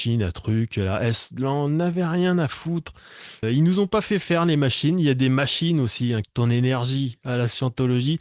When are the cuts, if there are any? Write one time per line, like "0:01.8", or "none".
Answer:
0:03.4
0:06.2